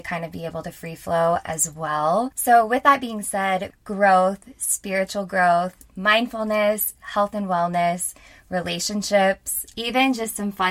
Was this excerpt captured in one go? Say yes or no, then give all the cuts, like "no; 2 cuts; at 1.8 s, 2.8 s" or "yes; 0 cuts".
no; 1 cut; at 3.7 s